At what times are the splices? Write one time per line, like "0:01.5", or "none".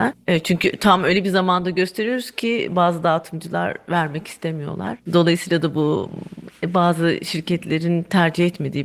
0:05.1